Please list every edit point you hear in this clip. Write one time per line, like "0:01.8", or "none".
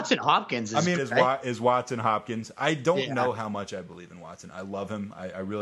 0:01.0